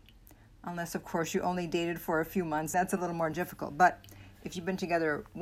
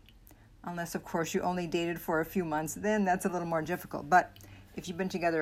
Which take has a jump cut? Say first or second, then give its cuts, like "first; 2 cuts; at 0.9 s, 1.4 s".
first; 1 cut; at 2.7 s